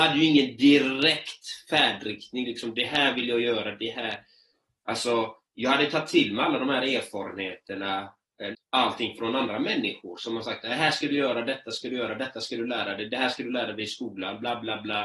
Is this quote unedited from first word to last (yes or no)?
no